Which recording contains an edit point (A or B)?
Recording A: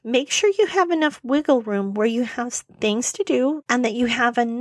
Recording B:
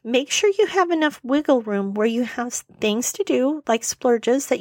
A